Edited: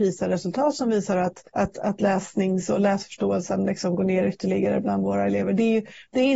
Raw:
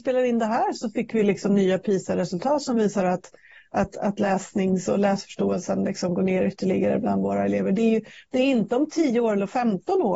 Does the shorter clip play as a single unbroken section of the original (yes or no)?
no